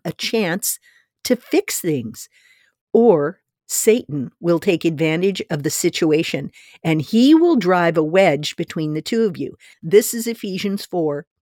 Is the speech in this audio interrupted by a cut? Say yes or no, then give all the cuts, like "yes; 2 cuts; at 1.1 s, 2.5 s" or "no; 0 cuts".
yes; 1 cut; at 9.7 s